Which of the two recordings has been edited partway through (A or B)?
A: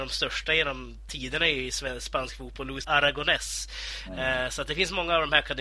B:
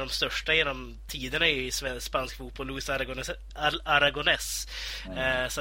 A